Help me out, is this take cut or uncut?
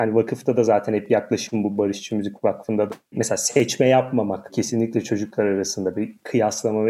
uncut